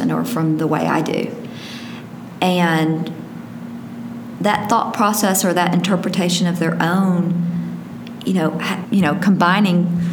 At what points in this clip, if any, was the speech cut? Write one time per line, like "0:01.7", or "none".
0:08.8